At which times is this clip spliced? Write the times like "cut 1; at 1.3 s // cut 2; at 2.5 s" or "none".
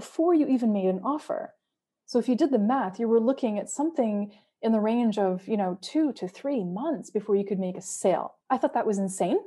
cut 1; at 8.4 s